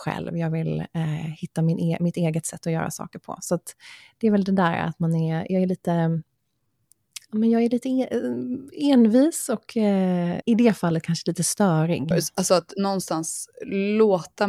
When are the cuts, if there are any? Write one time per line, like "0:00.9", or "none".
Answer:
0:10.4
0:12.1